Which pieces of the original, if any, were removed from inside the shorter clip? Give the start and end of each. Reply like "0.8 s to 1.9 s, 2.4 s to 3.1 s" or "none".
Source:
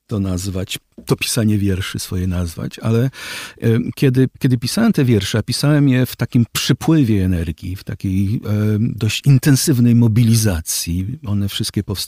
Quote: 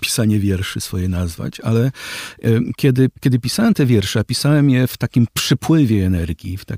none